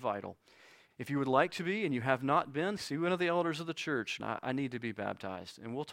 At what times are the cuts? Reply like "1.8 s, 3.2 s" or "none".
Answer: 0.9 s, 2.8 s, 4.2 s

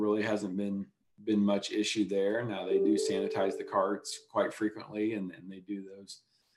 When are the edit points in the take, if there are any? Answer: none

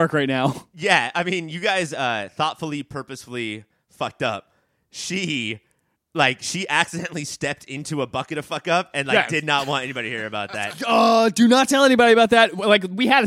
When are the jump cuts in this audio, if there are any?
none

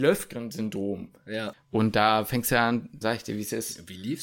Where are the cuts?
1.5 s, 3.0 s

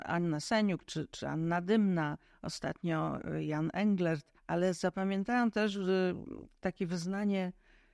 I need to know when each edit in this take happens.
1.1 s, 4.4 s

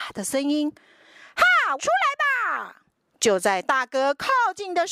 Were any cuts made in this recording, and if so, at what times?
1.8 s

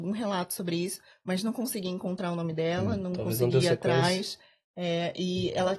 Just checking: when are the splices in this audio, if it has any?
none

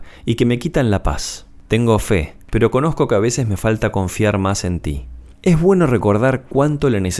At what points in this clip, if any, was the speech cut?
5.3 s

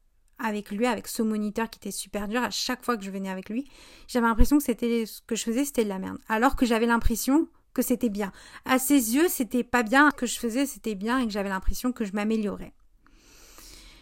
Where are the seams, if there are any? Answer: 10.1 s

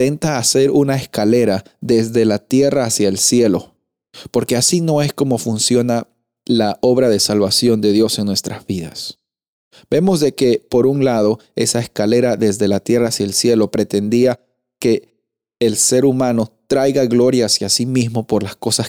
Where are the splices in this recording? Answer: none

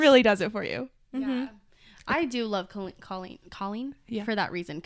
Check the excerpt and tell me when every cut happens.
none

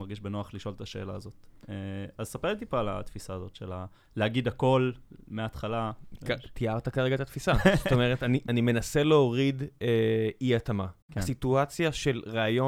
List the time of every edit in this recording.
11.0 s

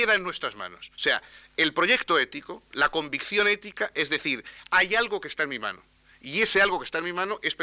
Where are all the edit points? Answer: 0.9 s, 4.7 s

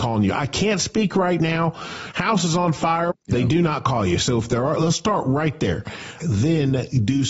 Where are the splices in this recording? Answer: 3.1 s, 4.7 s, 6.2 s

